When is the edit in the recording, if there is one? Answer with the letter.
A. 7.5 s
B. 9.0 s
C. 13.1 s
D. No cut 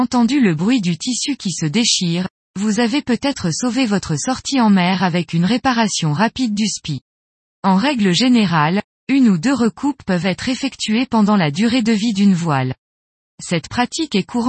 A